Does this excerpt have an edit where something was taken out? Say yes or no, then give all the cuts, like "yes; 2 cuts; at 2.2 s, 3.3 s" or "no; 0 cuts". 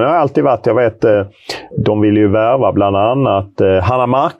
no; 0 cuts